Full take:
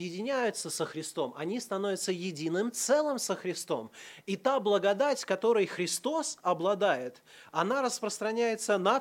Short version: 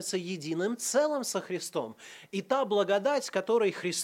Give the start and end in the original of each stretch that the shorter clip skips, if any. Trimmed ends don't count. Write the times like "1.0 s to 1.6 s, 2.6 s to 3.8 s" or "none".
none